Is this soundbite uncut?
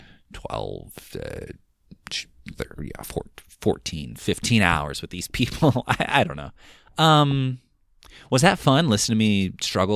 yes; 0 cuts

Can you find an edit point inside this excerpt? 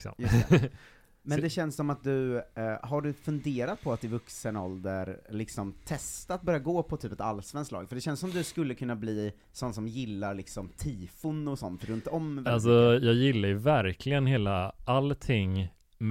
no; 0 cuts

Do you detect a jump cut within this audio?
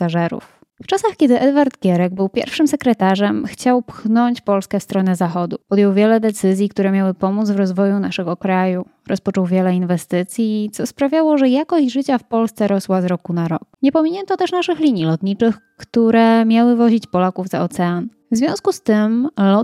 yes; 1 cut; at 5.6 s

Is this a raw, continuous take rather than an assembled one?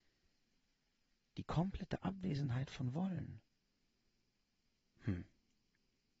yes; 0 cuts

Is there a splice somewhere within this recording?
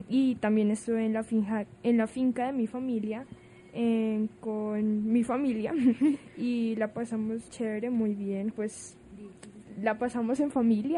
yes; 2 cuts; at 7.5 s, 8.5 s

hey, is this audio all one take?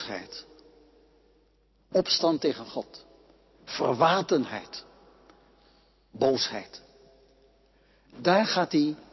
yes; 0 cuts

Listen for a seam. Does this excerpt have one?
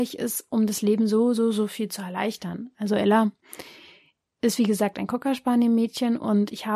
no; 0 cuts

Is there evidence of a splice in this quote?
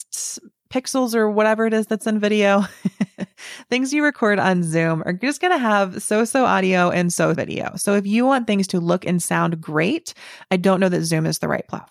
yes; 1 cut; at 7.3 s

